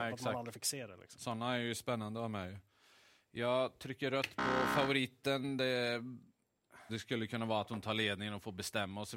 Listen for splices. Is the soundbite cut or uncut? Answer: cut